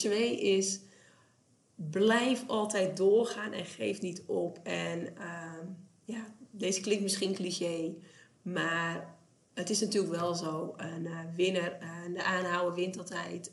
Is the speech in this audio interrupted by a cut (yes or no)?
no